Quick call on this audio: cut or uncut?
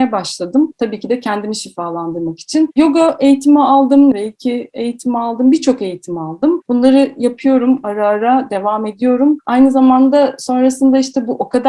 cut